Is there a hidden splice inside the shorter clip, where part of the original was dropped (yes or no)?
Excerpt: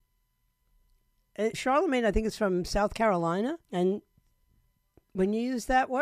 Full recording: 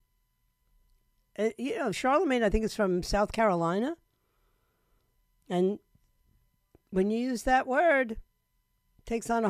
yes